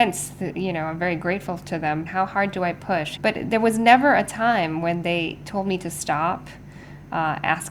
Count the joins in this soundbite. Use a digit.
2